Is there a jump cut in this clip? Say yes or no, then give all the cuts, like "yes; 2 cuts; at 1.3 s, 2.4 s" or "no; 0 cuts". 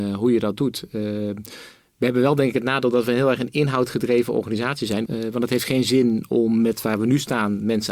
yes; 1 cut; at 5.1 s